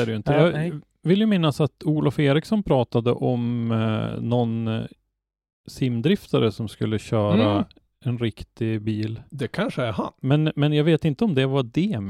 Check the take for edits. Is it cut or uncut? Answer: uncut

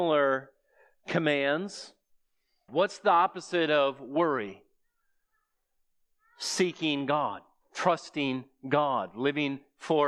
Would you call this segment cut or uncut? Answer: cut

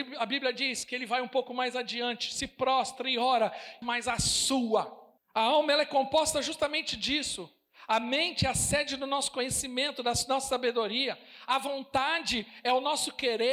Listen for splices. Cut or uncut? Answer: cut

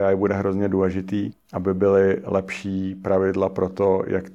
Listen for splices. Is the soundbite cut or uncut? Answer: cut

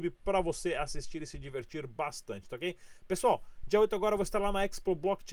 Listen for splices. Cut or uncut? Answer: uncut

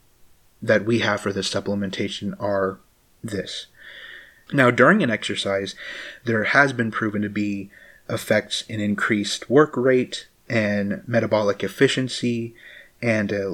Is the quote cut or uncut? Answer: cut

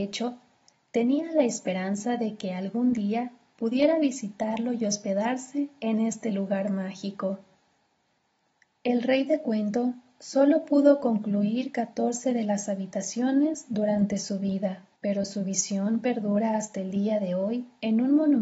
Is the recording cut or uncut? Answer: cut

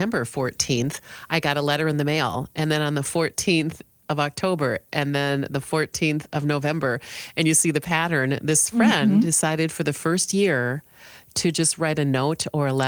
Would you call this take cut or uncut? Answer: uncut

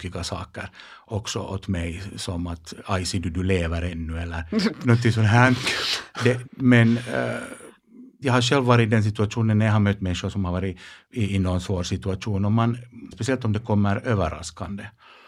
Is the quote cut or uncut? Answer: cut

